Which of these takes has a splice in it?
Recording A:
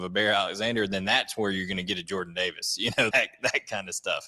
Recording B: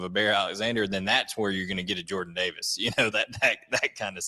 A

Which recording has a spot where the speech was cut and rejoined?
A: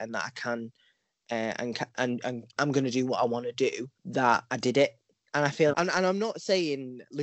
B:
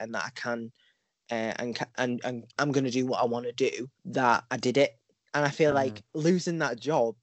A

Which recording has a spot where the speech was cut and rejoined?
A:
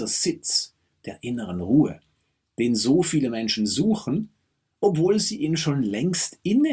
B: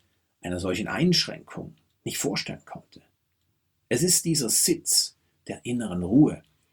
B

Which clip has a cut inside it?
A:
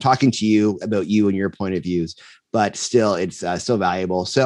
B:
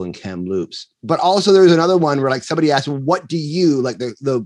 B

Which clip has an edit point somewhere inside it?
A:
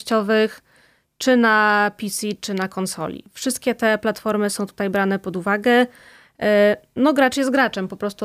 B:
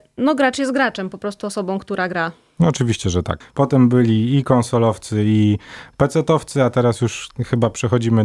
B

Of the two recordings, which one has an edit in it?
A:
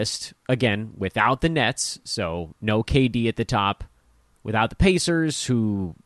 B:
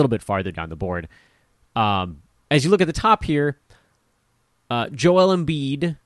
A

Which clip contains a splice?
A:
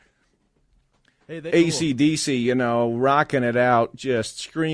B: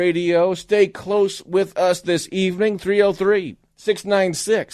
A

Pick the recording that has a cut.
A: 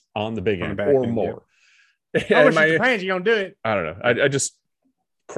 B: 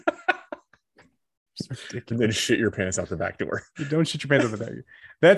A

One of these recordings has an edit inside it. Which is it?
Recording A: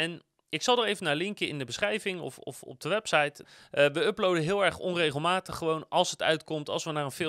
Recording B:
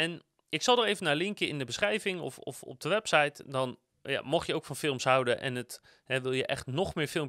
A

